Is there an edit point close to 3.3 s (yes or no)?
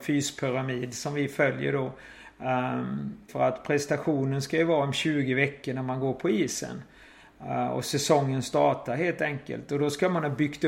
yes